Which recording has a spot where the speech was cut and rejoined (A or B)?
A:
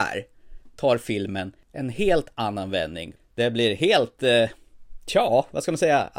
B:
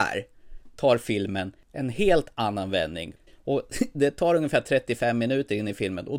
B